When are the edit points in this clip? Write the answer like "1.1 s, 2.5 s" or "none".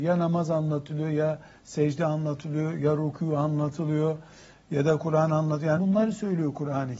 5.8 s